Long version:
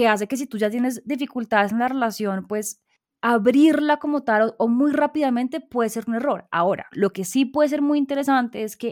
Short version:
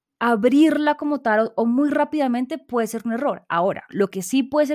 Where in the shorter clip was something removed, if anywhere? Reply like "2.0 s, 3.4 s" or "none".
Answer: none